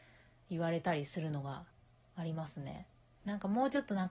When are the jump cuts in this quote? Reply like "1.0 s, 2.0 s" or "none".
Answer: 3.2 s